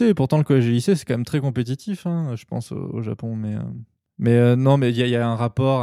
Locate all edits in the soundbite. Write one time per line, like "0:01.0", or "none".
none

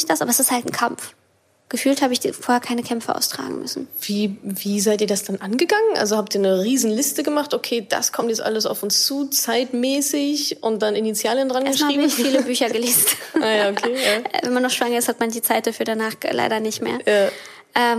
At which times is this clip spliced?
none

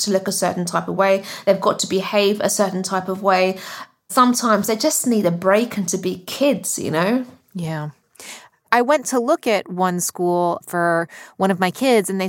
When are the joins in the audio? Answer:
none

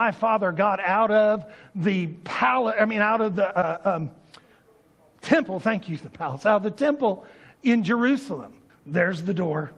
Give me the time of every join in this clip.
0:08.7

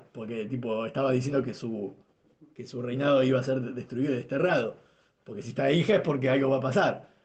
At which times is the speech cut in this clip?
none

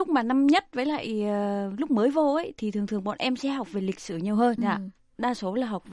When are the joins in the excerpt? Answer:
0:04.6

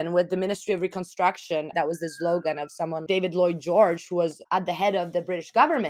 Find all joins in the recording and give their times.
0:01.7
0:03.1

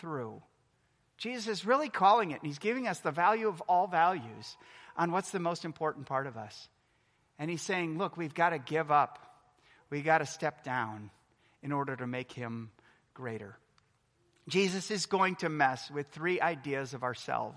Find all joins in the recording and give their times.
none

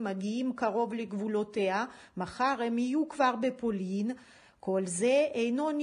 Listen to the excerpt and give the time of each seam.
none

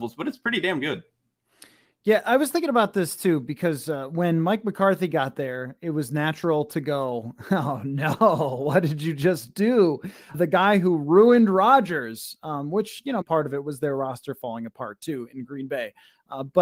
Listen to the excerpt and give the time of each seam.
0:10.3
0:13.2

